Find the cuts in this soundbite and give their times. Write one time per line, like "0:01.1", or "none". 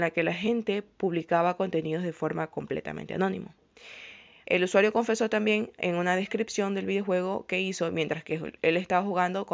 0:04.4